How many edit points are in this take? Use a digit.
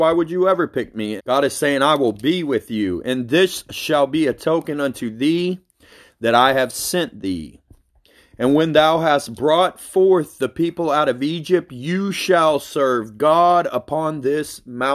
1